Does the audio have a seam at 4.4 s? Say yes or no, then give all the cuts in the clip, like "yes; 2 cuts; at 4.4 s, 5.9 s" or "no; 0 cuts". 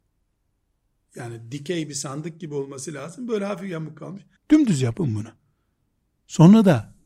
yes; 1 cut; at 4.4 s